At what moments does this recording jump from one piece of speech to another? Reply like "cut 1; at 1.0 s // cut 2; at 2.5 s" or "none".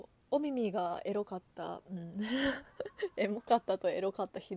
none